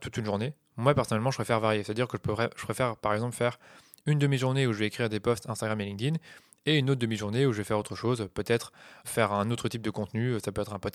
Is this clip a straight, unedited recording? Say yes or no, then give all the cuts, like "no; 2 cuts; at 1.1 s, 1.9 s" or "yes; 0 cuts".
no; 1 cut; at 9.0 s